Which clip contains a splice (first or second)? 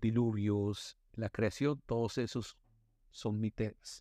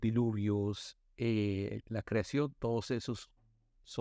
first